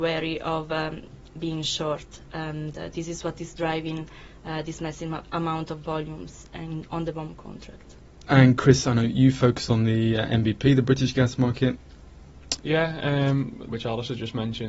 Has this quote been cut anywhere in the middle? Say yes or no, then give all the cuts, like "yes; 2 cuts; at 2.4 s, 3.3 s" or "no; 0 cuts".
yes; 2 cuts; at 12.6 s, 13.7 s